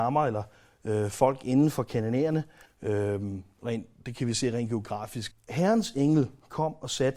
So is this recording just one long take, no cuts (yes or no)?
no